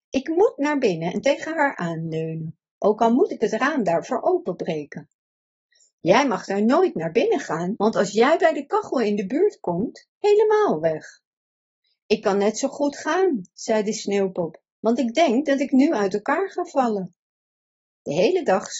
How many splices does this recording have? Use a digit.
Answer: 2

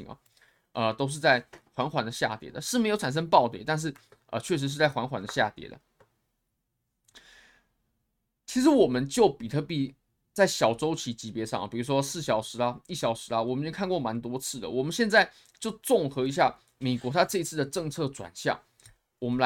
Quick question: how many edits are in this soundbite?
0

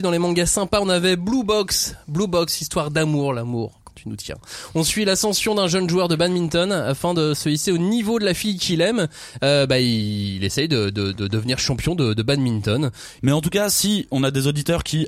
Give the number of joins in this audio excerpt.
1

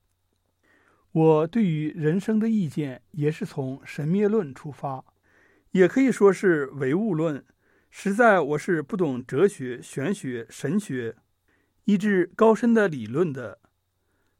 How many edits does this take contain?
0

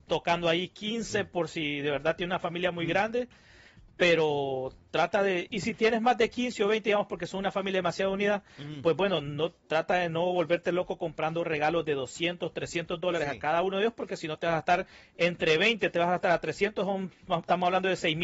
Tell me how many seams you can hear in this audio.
1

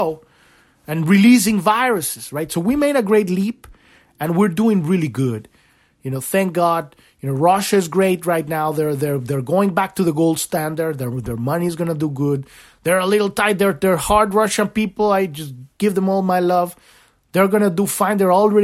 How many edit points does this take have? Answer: 0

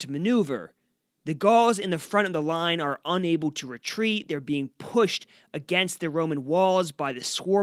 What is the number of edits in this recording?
1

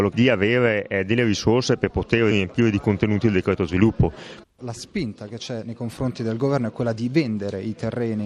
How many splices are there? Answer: 2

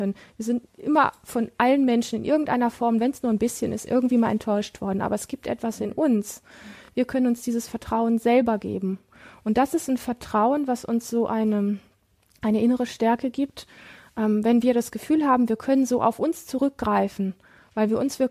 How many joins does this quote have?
0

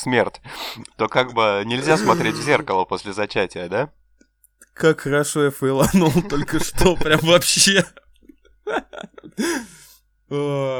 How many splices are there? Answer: 0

